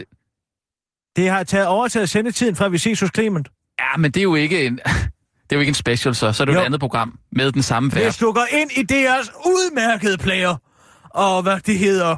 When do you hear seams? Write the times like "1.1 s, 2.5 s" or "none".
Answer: none